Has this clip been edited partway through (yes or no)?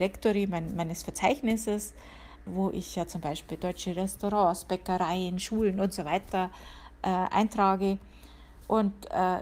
yes